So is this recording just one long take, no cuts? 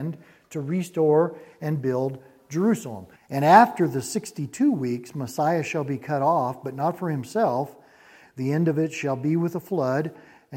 no; 2 cuts; at 3.2 s, 8.3 s

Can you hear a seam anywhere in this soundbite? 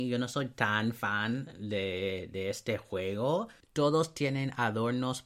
yes; 1 cut; at 3.6 s

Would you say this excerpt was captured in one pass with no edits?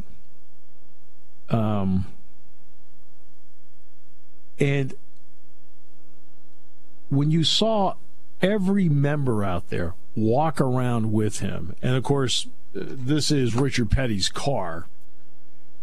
yes; 0 cuts

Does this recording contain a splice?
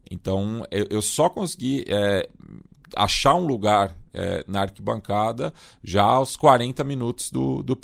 no; 0 cuts

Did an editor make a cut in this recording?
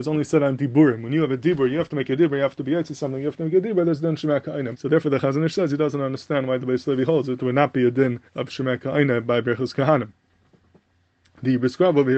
yes; 2 cuts; at 4.7 s, 8.3 s

